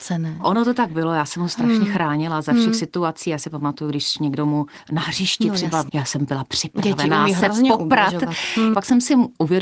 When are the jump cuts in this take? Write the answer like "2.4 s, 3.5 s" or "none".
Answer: 5.9 s, 8.7 s